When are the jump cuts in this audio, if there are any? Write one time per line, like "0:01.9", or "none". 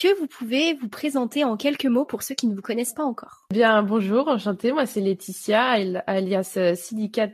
none